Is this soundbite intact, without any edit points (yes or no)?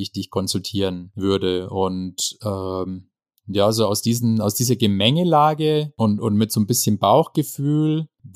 yes